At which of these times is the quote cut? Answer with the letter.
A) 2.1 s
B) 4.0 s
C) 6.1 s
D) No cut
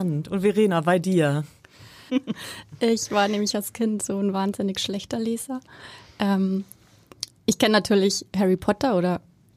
A